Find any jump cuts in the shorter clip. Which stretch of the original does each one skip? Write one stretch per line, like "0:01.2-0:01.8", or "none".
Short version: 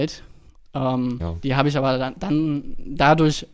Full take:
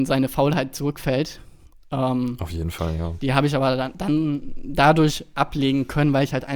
0:02.4-0:03.0